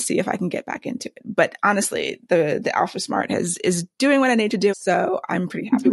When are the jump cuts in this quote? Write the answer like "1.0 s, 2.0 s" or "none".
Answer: 4.7 s